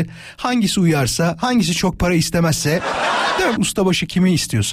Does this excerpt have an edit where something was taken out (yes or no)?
yes